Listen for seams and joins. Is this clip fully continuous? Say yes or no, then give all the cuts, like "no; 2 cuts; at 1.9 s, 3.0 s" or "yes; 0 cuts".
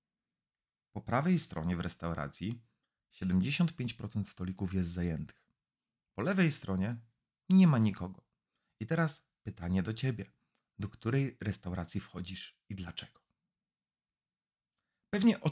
yes; 0 cuts